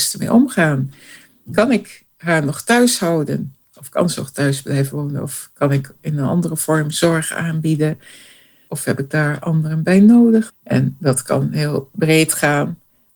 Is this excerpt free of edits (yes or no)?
no